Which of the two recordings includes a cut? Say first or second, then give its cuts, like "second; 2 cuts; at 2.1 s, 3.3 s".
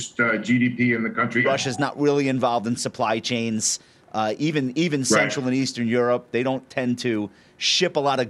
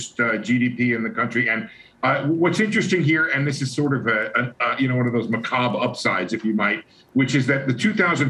first; 1 cut; at 1.4 s